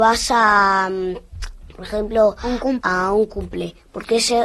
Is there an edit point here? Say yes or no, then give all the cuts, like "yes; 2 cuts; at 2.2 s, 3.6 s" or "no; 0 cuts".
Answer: yes; 1 cut; at 2.8 s